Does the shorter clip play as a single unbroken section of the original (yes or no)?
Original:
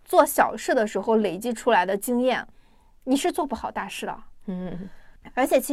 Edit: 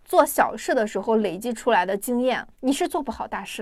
no